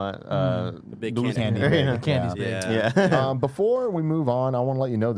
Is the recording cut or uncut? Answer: cut